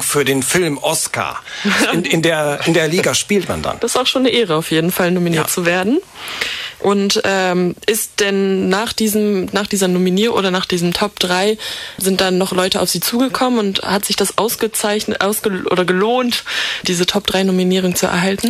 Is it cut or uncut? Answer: cut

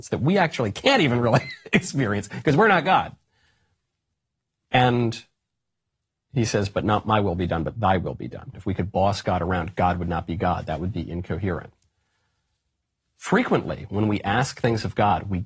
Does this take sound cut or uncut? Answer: cut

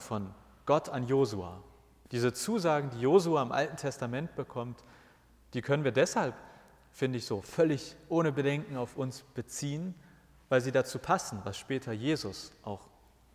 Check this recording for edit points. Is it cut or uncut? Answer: cut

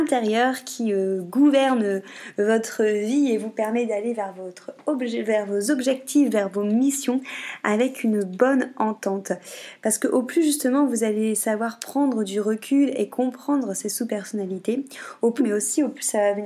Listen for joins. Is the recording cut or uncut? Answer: cut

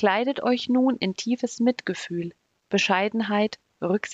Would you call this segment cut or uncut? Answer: cut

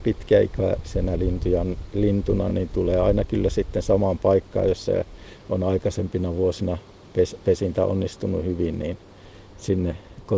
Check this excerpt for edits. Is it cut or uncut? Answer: uncut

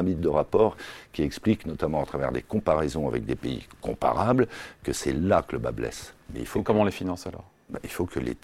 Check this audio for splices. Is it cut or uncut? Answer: cut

